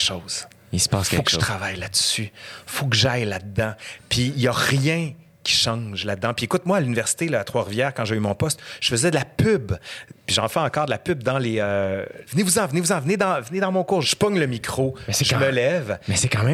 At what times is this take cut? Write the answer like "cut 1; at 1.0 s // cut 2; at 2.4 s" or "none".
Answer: cut 1; at 12.2 s // cut 2; at 14.0 s